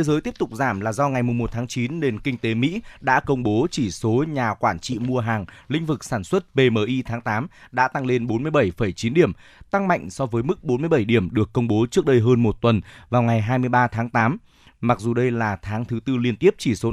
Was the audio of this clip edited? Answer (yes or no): no